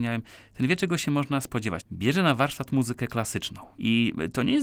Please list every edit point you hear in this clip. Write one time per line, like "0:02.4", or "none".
0:01.8